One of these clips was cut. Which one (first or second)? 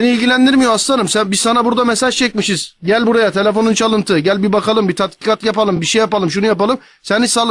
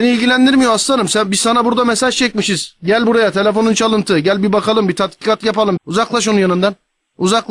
second